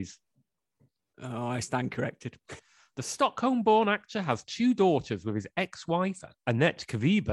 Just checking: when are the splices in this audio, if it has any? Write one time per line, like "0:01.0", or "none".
0:02.6